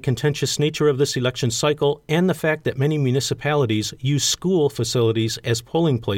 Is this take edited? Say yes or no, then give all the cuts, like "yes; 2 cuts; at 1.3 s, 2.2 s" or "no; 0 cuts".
no; 0 cuts